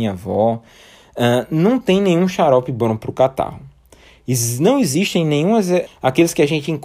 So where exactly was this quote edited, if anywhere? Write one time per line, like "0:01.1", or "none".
0:05.9